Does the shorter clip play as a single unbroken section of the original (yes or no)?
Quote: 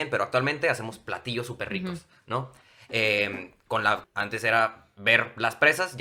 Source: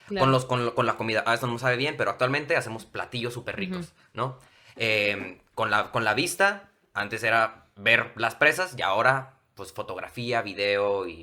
no